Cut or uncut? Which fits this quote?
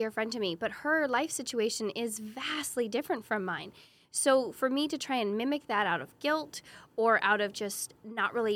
uncut